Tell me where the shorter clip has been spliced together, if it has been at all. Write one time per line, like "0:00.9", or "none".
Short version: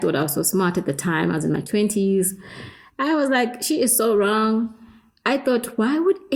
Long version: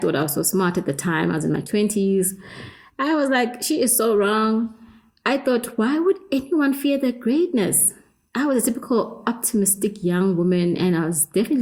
none